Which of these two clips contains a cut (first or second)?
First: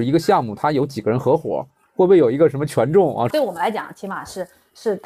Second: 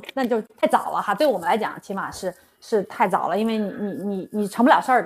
first